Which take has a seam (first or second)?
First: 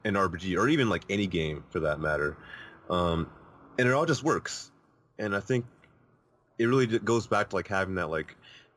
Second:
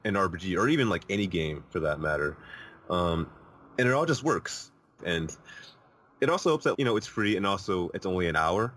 second